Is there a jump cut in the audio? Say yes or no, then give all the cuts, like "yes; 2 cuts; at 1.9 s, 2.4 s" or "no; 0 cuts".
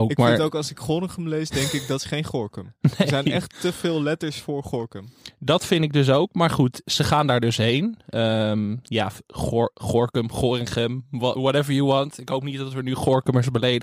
no; 0 cuts